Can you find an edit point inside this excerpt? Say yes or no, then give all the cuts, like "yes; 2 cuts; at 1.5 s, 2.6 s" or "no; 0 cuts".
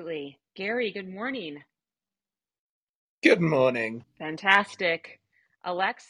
yes; 1 cut; at 4.0 s